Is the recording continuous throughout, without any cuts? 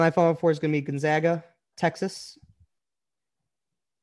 no; 1 cut; at 1.7 s

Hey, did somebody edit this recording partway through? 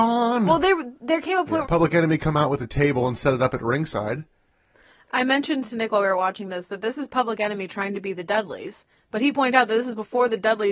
yes; 1 cut; at 1.6 s

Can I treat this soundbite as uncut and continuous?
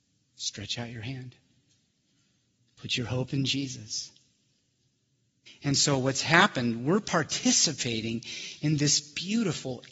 no; 1 cut; at 5.5 s

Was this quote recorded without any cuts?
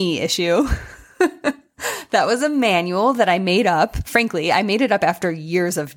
yes; 0 cuts

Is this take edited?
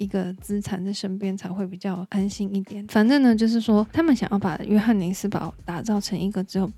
yes; 1 cut; at 2.8 s

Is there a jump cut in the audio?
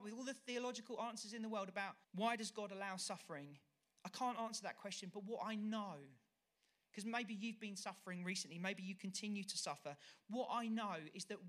yes; 1 cut; at 2.0 s

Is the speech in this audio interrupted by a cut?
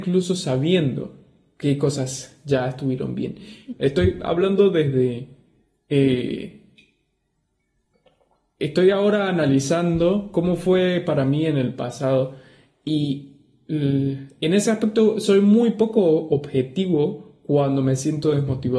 yes; 1 cut; at 3.7 s

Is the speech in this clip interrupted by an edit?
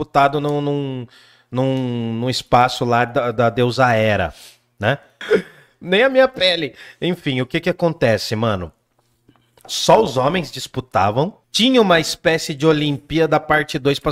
yes; 2 cuts; at 5.2 s, 11.4 s

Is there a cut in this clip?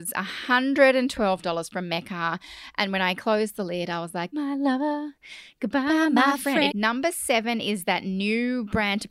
yes; 2 cuts; at 4.3 s, 6.7 s

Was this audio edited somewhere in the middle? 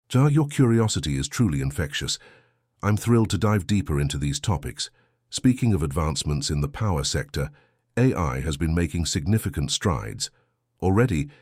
no; 0 cuts

